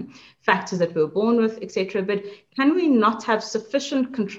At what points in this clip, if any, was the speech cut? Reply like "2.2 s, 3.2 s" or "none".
none